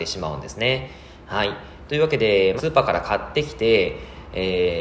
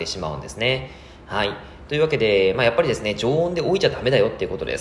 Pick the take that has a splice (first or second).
first